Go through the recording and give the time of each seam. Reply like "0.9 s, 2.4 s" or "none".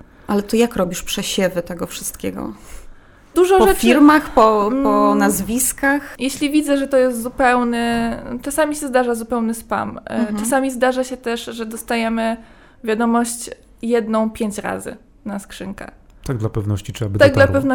none

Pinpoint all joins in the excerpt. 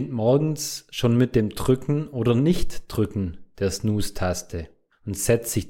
none

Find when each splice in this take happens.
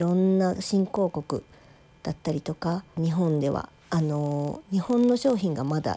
3.0 s

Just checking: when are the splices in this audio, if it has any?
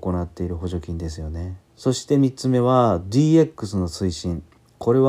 1.7 s

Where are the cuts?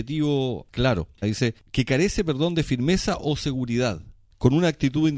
1.2 s

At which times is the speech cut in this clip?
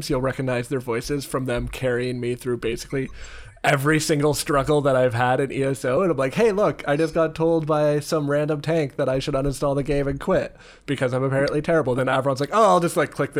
none

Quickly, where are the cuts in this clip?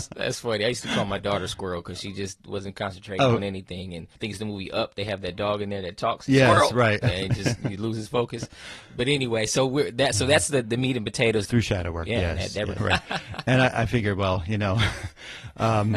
4.1 s, 11.5 s, 12.8 s

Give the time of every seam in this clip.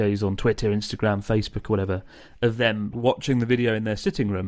2.9 s

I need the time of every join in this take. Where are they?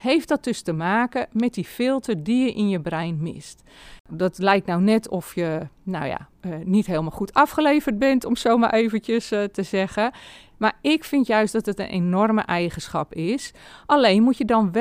none

